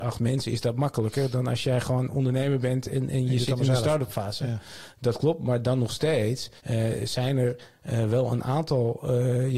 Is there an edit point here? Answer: yes; 1 cut; at 6.6 s

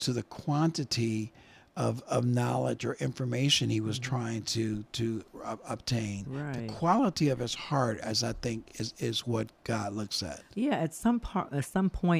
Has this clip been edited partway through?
no; 0 cuts

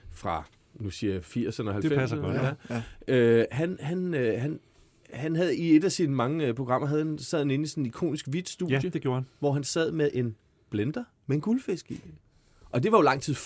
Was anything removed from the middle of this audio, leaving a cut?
no; 0 cuts

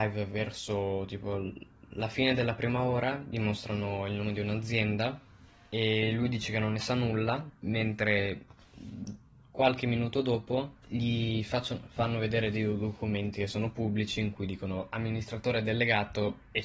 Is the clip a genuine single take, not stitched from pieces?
no; 1 cut; at 7.6 s

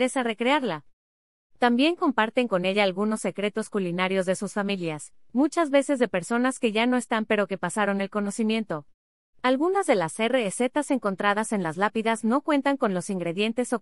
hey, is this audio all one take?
no; 2 cuts; at 1.4 s, 9.3 s

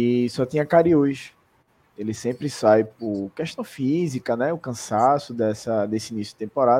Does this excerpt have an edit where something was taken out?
yes; 1 cut; at 1.8 s

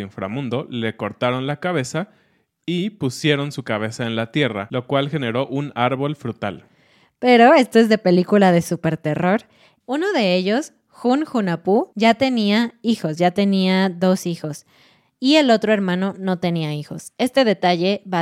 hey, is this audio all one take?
no; 1 cut; at 9.8 s

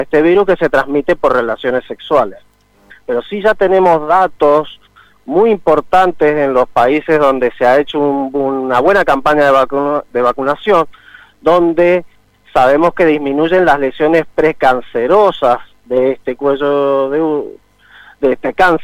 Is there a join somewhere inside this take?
yes; 1 cut; at 2.9 s

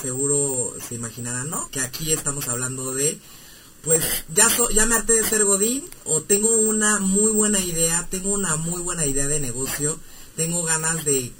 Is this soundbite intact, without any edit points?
no; 1 cut; at 1.7 s

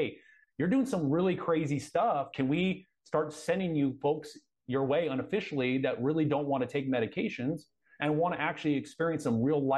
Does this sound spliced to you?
yes; 1 cut; at 2.3 s

